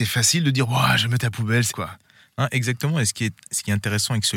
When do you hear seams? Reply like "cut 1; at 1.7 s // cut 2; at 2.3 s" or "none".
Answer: cut 1; at 1.7 s

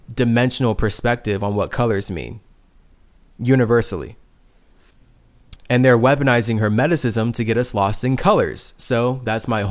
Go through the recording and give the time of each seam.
cut 1; at 5.6 s

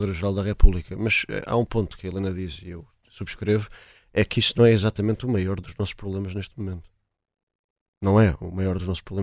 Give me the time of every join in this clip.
none

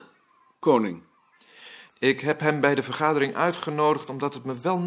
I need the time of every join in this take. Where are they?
cut 1; at 1.9 s

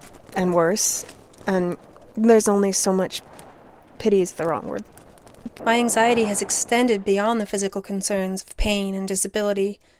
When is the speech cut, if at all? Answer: cut 1; at 3.8 s // cut 2; at 5.6 s

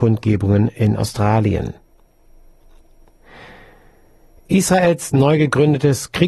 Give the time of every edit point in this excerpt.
none

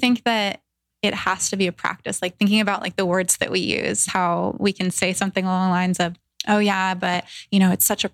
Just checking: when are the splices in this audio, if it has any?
none

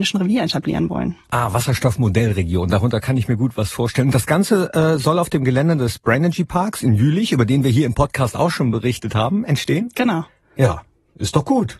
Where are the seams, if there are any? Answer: none

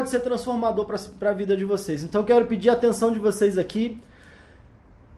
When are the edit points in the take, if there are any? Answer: none

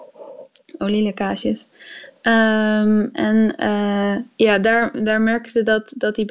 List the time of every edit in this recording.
none

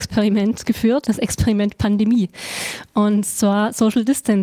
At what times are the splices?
cut 1; at 1.0 s

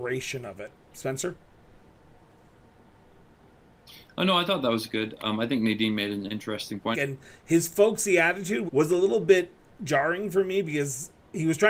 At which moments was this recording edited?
cut 1; at 6.9 s // cut 2; at 8.7 s

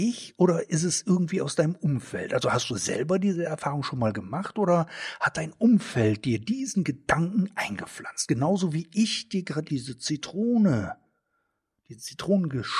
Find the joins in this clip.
cut 1; at 9.7 s

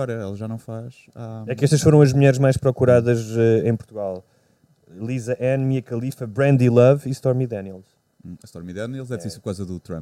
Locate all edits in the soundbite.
none

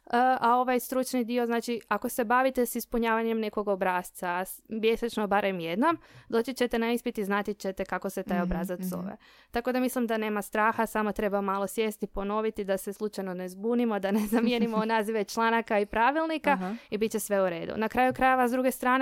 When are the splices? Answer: none

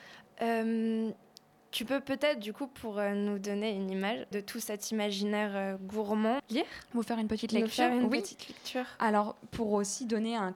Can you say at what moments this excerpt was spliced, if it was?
cut 1; at 4.3 s // cut 2; at 6.4 s

